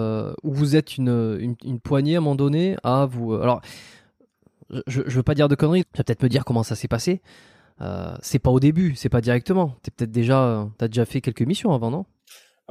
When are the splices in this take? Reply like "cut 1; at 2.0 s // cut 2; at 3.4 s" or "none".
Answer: cut 1; at 5.8 s